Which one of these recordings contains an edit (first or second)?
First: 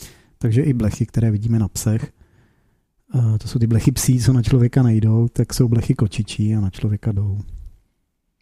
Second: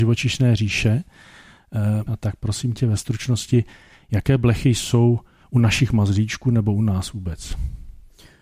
second